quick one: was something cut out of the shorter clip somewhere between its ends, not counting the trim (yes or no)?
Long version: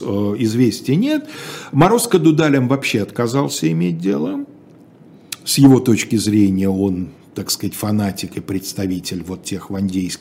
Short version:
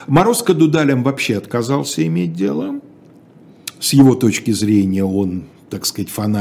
no